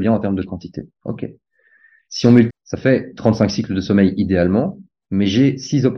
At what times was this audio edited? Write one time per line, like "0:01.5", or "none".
0:02.5